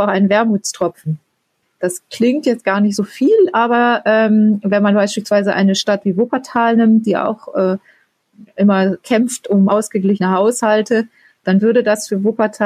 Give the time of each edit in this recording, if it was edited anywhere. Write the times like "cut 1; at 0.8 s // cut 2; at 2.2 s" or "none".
cut 1; at 1.6 s